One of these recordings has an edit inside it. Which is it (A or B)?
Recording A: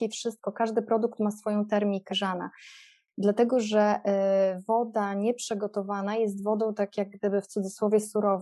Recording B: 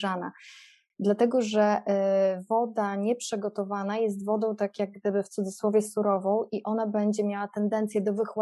A